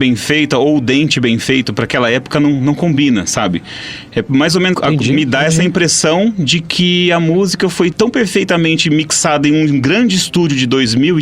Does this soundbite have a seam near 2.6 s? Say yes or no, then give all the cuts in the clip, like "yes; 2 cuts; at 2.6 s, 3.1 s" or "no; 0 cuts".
no; 2 cuts; at 4.7 s, 7.9 s